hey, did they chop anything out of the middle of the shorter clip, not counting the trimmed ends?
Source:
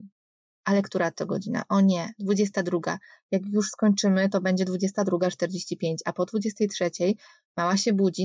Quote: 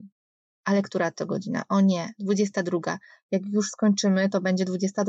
no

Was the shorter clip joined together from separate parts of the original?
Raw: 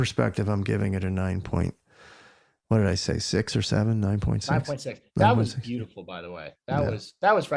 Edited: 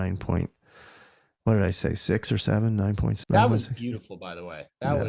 yes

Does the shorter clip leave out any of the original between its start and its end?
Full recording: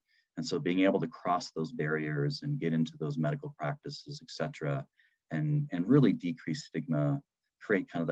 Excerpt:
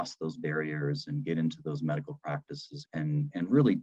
yes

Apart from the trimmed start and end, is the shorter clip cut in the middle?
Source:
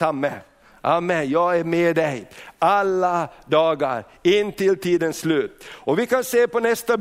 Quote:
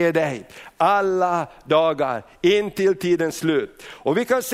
no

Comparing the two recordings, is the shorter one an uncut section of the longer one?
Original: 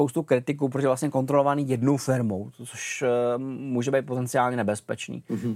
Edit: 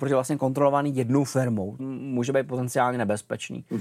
no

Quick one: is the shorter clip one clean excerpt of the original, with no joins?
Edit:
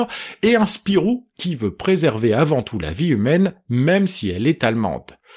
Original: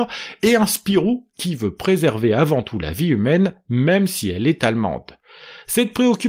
yes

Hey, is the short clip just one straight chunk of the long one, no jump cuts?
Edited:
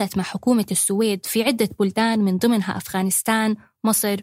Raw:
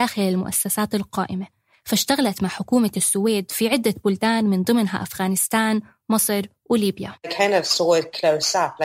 yes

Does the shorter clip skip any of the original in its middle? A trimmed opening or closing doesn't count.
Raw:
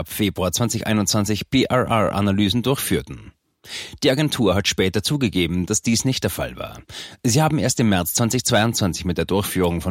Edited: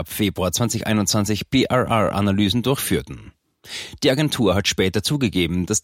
no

